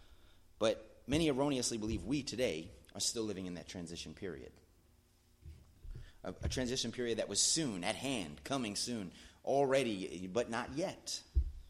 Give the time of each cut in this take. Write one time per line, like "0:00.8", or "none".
none